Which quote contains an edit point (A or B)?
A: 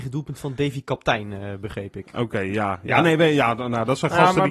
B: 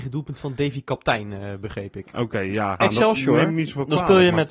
B